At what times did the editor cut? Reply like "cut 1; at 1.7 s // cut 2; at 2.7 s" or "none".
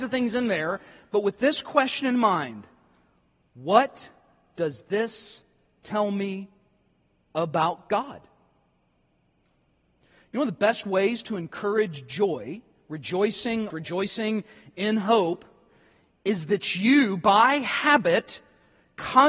cut 1; at 13.7 s